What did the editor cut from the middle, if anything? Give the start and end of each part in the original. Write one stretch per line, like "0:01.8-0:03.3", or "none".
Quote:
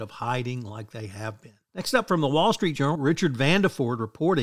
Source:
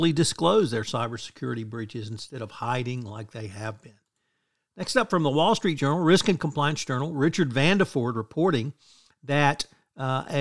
0:04.0-0:04.7
0:06.0-0:07.1